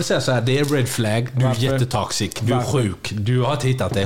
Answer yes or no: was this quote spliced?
no